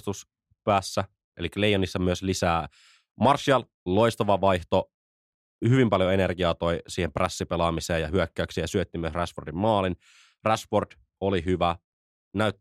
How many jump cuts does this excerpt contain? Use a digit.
1